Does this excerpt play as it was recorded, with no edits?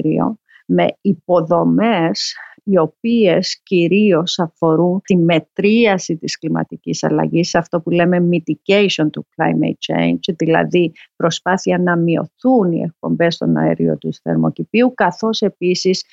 yes; 0 cuts

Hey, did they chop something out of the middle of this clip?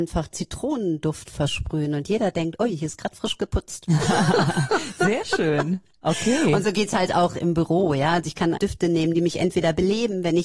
yes; 1 cut; at 8.5 s

